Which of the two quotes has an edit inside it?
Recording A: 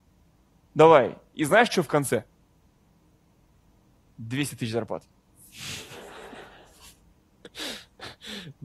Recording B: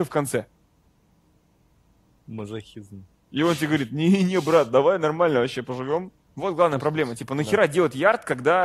B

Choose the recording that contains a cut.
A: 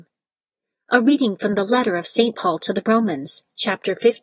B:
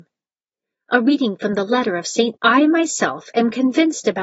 B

